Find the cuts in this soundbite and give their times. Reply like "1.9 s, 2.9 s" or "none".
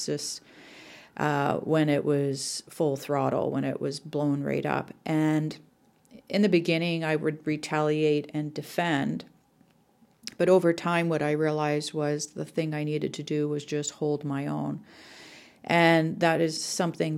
none